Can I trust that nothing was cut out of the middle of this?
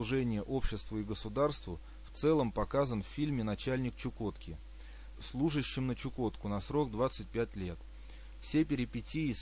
no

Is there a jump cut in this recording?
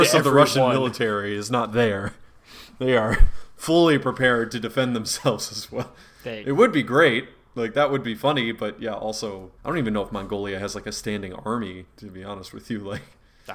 yes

